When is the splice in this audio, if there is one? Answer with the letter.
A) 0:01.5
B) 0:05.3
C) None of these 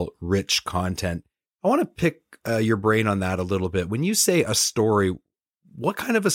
A